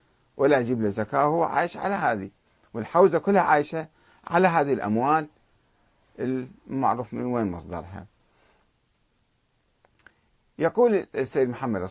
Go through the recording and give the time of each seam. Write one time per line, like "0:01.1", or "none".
none